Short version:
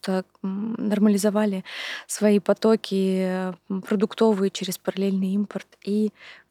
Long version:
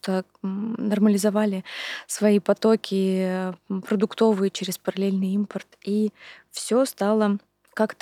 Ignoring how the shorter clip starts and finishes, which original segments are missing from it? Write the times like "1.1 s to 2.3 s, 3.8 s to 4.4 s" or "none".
none